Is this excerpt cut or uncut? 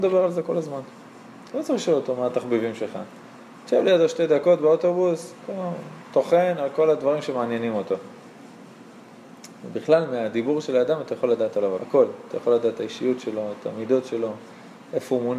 cut